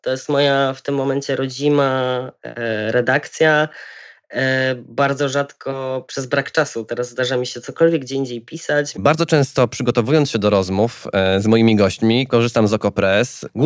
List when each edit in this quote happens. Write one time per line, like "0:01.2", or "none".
0:08.9
0:12.3